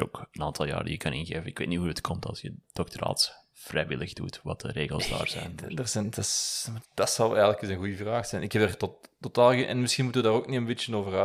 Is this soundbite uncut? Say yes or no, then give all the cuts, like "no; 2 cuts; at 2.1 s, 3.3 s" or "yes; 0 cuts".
no; 1 cut; at 6.8 s